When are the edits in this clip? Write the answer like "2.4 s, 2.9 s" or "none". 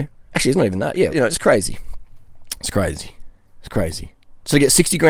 1.1 s

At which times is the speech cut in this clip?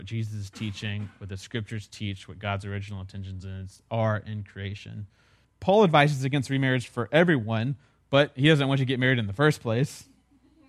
5.4 s

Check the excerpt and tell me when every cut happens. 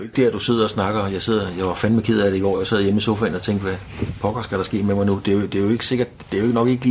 none

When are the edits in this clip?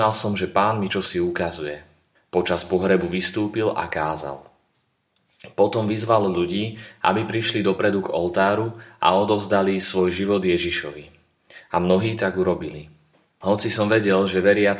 2.2 s

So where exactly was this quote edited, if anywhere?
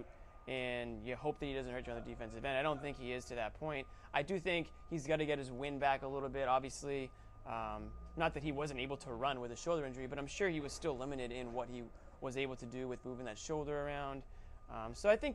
none

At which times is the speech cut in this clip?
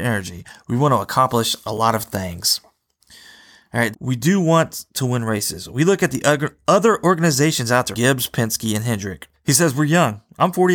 3.9 s, 7.9 s, 9.3 s

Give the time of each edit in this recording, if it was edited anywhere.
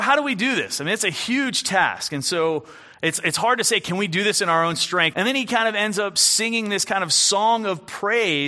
5.1 s

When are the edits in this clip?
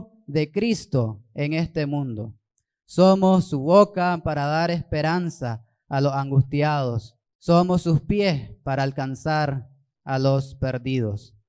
7.3 s

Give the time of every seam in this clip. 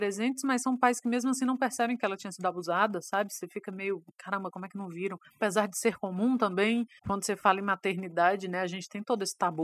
7.0 s

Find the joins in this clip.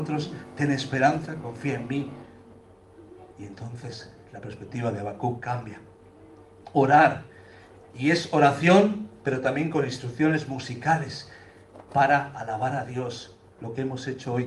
3.3 s

